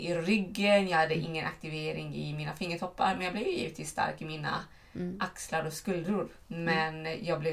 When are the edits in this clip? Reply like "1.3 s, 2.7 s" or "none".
none